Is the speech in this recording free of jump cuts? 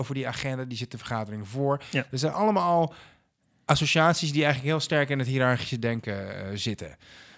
yes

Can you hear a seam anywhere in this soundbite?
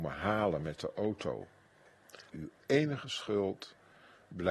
yes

